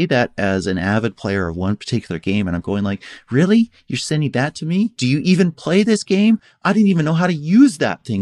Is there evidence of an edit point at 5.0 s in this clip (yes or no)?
yes